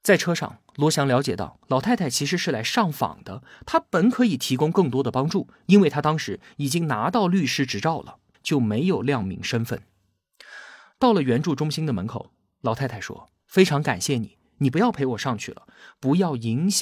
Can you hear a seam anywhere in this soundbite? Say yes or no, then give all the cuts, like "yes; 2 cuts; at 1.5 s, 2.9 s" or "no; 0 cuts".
yes; 1 cut; at 8.3 s